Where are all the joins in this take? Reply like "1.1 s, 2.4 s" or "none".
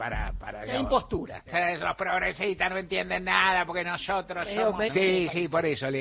1.5 s, 4.9 s